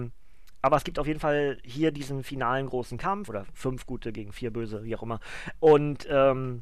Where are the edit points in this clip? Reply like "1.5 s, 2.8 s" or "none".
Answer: 3.3 s, 5.5 s